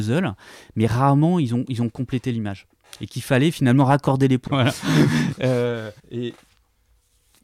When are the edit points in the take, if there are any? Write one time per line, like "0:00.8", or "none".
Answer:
0:04.5
0:06.0